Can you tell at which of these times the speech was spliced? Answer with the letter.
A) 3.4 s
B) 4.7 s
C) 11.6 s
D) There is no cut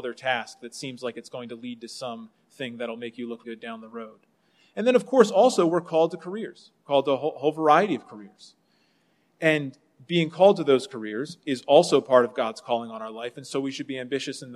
A